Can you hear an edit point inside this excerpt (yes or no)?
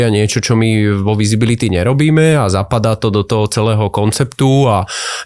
no